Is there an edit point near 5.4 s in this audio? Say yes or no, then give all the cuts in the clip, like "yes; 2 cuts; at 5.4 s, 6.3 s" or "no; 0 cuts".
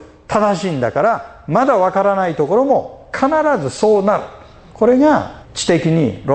yes; 1 cut; at 5.4 s